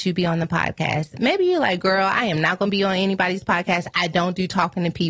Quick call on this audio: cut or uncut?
uncut